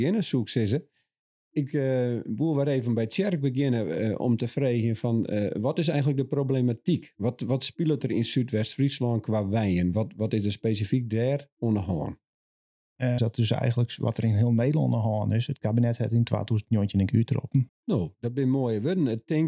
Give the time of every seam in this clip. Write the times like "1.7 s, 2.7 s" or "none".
13.2 s, 17.7 s